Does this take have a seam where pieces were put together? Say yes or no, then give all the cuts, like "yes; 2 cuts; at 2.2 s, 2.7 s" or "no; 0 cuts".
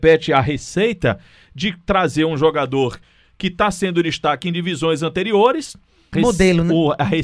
yes; 1 cut; at 6.1 s